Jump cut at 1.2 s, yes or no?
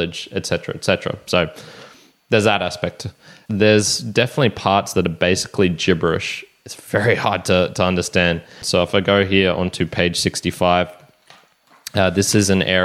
no